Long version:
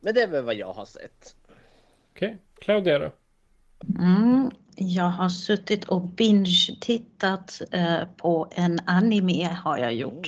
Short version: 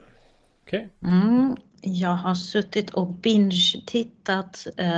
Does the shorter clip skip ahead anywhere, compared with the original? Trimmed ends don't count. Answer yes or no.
yes